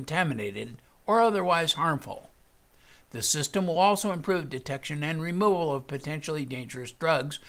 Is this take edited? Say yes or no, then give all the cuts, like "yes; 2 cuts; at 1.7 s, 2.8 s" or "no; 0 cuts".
no; 0 cuts